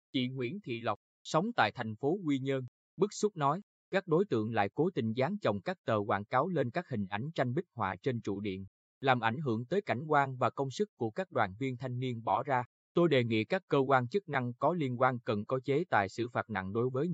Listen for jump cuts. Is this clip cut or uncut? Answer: uncut